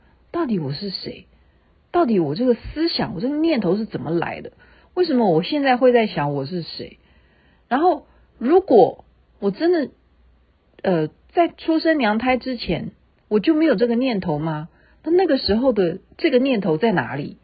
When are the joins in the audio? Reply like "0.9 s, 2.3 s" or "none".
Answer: none